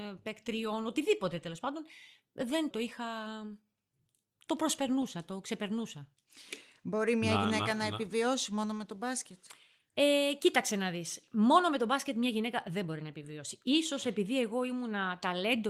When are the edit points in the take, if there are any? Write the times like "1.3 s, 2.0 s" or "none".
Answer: 2.7 s